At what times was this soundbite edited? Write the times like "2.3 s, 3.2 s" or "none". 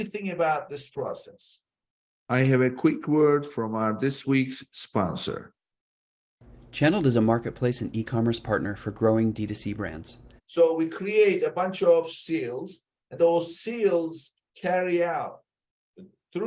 10.4 s, 13.2 s